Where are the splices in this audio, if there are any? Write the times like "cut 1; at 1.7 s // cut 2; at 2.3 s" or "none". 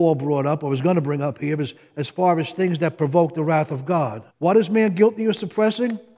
cut 1; at 4.3 s